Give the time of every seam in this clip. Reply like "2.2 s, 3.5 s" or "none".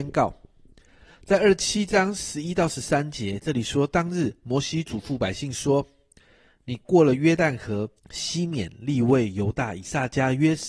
8.0 s